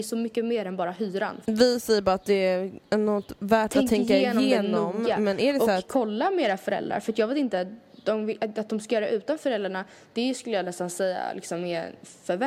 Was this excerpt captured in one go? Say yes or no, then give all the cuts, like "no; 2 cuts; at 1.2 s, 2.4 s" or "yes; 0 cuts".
no; 1 cut; at 1.4 s